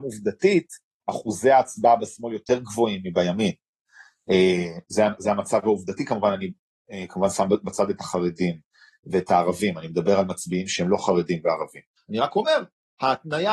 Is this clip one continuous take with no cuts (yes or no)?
no